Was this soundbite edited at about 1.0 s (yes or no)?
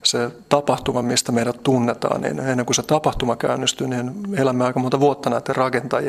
no